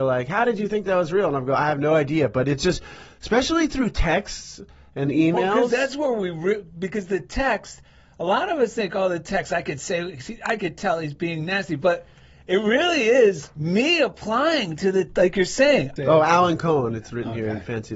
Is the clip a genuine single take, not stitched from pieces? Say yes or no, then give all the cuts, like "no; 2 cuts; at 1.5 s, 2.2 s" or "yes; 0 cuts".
no; 1 cut; at 16.0 s